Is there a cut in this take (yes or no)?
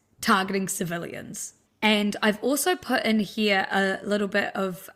yes